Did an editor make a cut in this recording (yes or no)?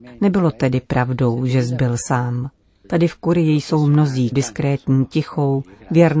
yes